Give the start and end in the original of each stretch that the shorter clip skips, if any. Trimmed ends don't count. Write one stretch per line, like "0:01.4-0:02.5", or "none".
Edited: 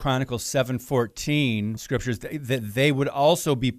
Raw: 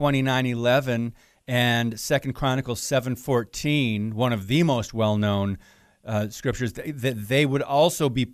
0:04.1-0:06.3